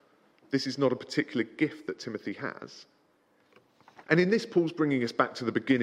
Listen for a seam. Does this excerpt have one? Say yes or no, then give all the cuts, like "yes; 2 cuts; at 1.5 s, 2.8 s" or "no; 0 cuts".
yes; 1 cut; at 4.0 s